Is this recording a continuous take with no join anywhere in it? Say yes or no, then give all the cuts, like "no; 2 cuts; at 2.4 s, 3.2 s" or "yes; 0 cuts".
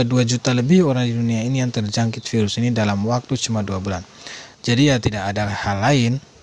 no; 1 cut; at 4.5 s